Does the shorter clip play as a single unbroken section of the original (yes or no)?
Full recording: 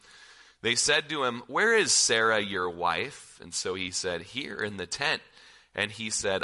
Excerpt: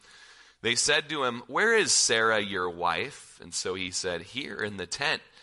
yes